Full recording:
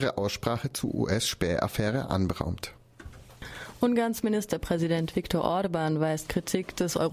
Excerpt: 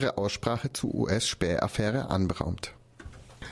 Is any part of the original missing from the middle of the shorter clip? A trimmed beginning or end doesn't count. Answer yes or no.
no